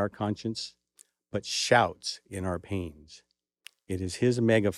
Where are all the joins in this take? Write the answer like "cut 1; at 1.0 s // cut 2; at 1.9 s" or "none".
none